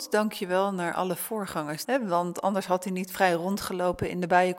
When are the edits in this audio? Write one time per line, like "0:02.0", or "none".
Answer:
0:01.8